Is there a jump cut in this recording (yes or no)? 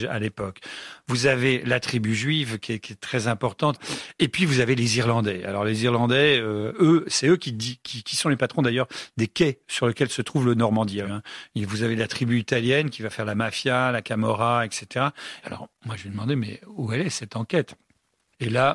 yes